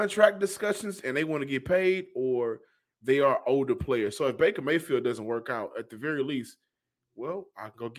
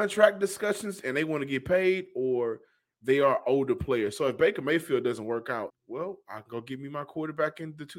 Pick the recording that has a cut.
second; 1 cut; at 5.7 s

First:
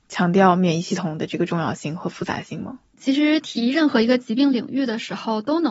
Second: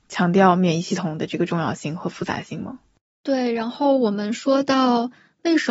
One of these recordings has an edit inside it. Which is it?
first; 1 cut; at 2.9 s

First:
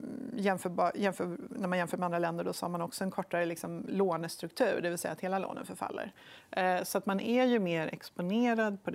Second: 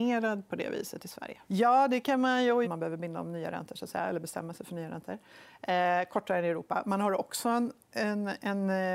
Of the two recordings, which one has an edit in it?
second; 2 cuts; at 1.4 s, 2.6 s

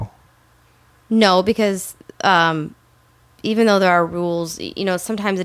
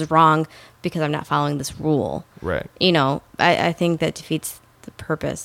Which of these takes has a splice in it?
second; 1 cut; at 3.3 s

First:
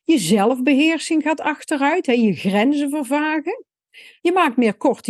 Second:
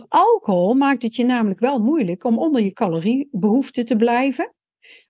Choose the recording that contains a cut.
first; 1 cut; at 4.2 s

